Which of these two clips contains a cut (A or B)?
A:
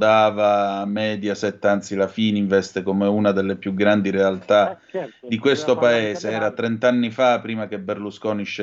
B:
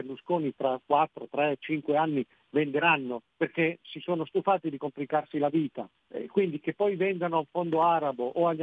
B